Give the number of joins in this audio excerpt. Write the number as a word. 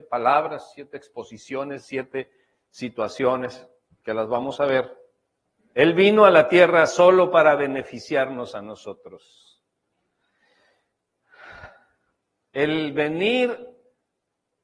one